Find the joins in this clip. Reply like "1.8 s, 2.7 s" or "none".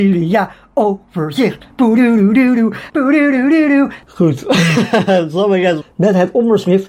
2.9 s, 4.0 s, 5.8 s

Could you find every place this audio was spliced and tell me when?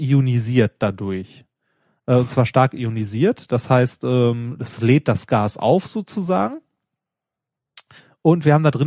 none

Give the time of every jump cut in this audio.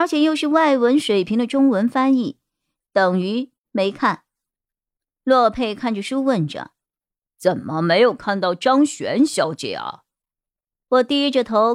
2.8 s

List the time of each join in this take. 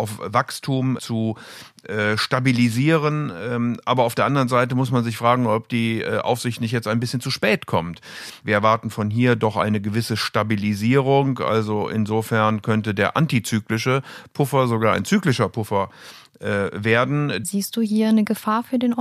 1.0 s, 8.4 s, 17.4 s

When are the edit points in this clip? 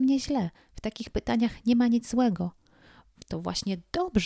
none

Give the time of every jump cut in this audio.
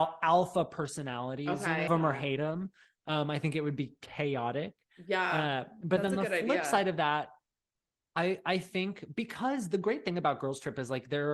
1.9 s

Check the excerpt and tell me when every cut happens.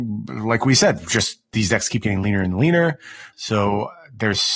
3.3 s

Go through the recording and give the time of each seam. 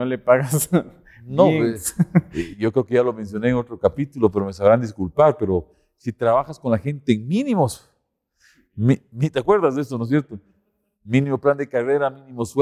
none

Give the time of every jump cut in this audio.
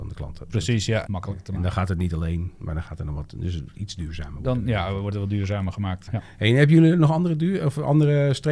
1.1 s, 6.1 s

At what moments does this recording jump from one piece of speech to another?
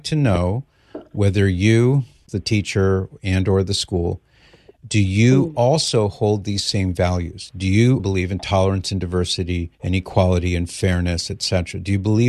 8.0 s, 9.7 s

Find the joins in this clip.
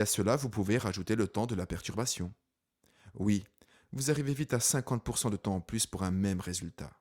none

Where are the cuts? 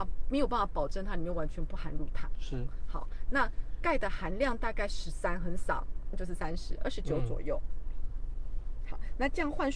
6.1 s

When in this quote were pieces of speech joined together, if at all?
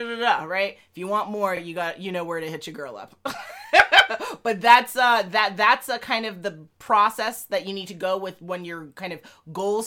none

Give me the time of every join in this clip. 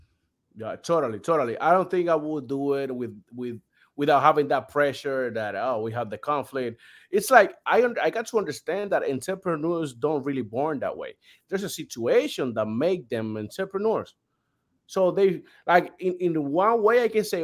none

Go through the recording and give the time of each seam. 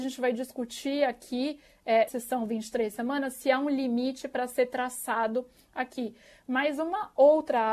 2.1 s

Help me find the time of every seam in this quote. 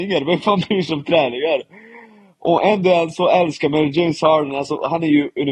none

